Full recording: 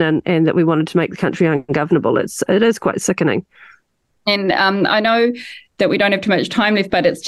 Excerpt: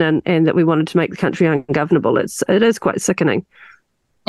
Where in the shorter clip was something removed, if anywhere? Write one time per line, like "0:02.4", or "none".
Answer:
none